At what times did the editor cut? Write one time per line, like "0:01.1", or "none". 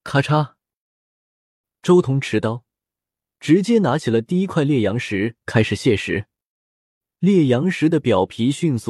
none